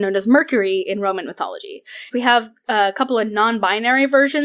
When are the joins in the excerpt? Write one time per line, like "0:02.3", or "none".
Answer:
0:02.1